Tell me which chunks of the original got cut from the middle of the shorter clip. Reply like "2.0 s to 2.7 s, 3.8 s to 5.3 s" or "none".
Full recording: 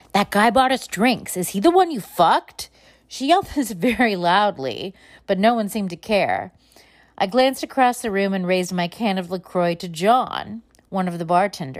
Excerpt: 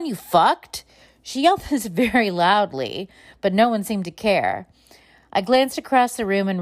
none